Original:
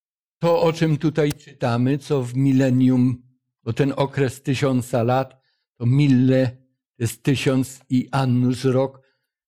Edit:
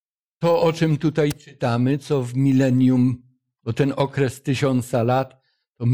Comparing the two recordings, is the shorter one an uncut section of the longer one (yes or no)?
yes